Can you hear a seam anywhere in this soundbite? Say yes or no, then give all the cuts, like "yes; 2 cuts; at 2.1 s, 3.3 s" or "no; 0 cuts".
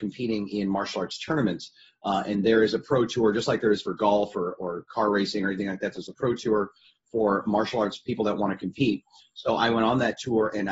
no; 0 cuts